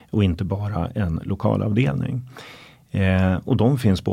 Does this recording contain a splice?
no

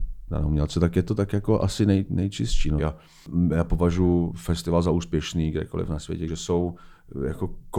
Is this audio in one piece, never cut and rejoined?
no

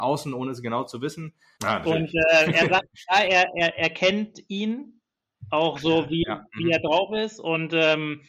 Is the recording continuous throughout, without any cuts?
no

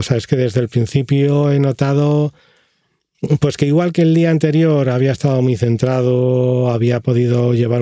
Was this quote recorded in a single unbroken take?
yes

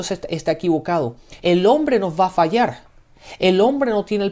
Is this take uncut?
no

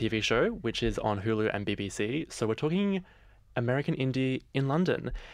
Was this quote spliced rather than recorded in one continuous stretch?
no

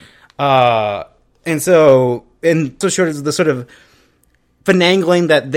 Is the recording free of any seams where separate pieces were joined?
no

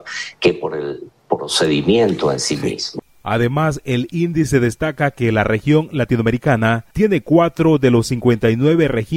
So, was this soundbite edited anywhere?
no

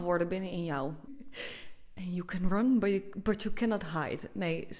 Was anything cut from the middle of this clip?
yes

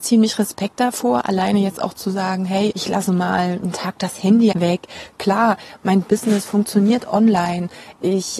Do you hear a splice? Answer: yes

